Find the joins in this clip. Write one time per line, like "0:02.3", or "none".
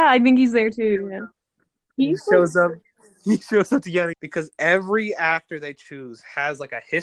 0:04.1